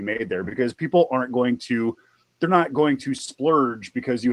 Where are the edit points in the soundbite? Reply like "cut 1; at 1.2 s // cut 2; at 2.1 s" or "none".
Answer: none